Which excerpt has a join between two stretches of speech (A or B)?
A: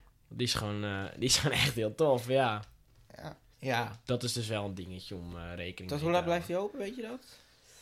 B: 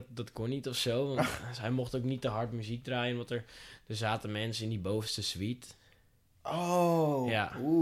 A